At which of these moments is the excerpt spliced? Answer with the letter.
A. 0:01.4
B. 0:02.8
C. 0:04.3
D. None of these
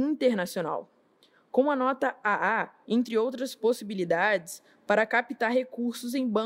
B